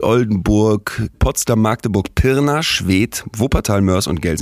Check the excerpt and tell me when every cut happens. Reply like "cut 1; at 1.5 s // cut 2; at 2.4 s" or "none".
cut 1; at 1.1 s